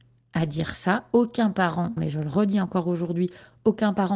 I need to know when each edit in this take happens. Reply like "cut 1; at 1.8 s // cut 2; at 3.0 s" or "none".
cut 1; at 2.0 s